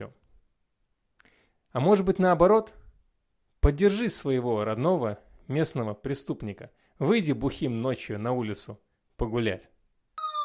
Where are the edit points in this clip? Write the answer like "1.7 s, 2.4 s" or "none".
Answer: none